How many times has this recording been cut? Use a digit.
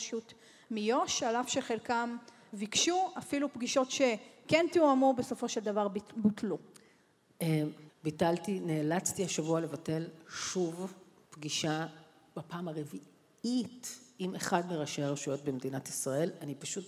1